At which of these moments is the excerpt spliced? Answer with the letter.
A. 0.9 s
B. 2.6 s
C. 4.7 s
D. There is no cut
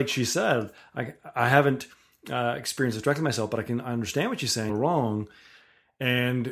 C